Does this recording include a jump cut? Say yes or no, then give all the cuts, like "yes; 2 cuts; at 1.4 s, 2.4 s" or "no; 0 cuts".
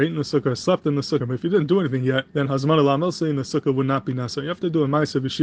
yes; 2 cuts; at 1.2 s, 2.3 s